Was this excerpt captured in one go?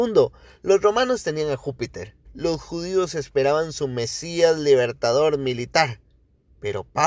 no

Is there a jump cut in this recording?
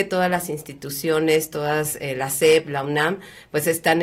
no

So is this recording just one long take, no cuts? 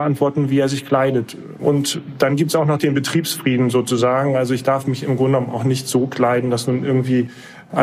no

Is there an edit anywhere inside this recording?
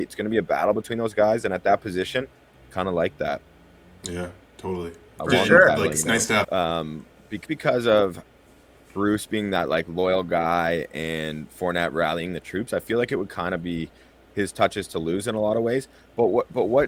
yes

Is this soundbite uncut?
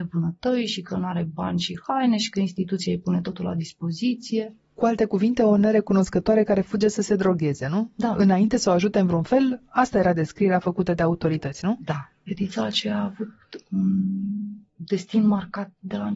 yes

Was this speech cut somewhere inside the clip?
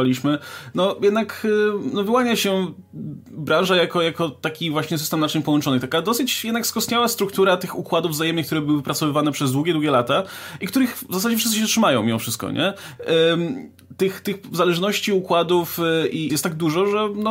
yes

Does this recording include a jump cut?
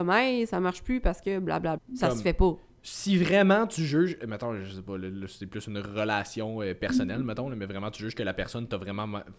yes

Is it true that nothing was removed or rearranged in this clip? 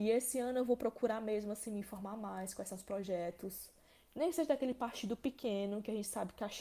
yes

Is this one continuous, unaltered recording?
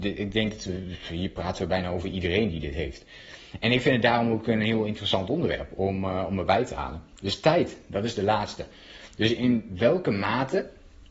yes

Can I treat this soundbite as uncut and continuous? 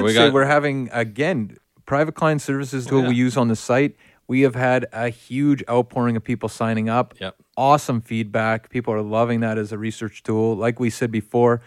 no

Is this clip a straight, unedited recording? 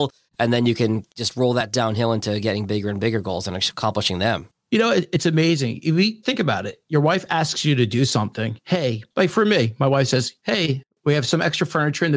no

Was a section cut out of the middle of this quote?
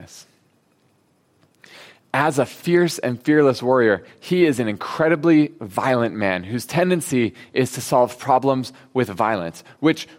no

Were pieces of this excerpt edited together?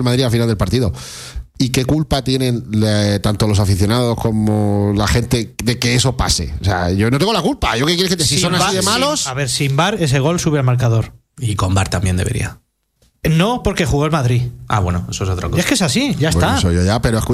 no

